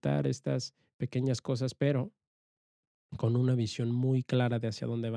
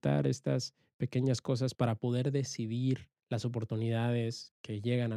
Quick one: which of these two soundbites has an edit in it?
second; 2 cuts; at 1.7 s, 3.2 s

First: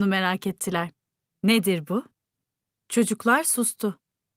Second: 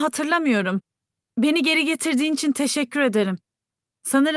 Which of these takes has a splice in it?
first; 1 cut; at 1.3 s

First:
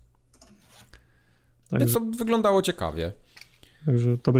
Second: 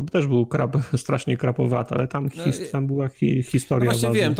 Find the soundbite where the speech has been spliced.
first; 1 cut; at 1.9 s

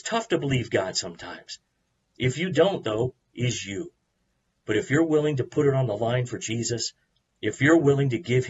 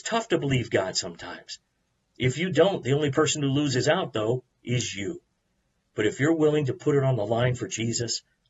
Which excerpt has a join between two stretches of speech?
first; 1 cut; at 2.8 s

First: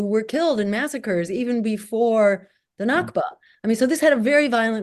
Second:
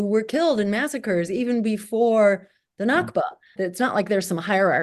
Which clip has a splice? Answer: second; 1 cut; at 3.6 s

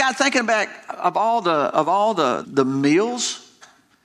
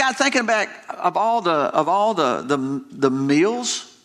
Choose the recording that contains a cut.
first; 1 cut; at 2.4 s

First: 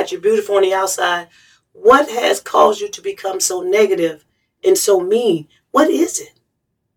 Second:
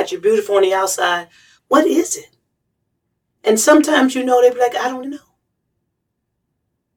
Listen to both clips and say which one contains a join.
second; 2 cuts; at 1.6 s, 5.0 s

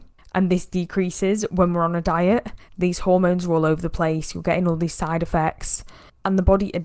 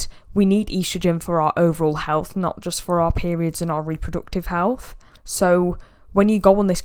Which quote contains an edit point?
first; 1 cut; at 2.7 s

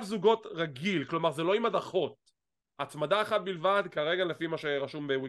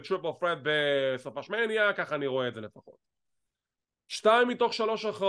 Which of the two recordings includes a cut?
first; 1 cut; at 2.6 s

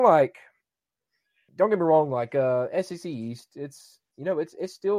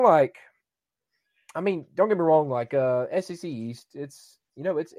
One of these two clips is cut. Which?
first; 1 cut; at 1.5 s

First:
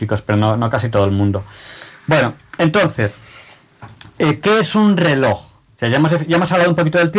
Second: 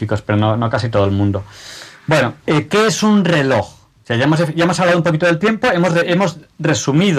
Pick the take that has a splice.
second; 1 cut; at 2.4 s

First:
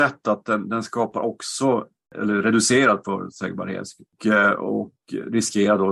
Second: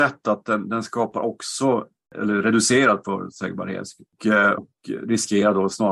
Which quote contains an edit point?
second; 1 cut; at 4.6 s

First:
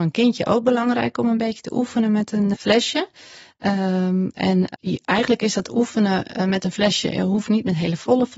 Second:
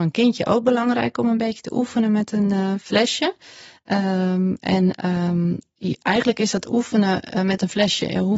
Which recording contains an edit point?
first; 2 cuts; at 2.5 s, 4.8 s

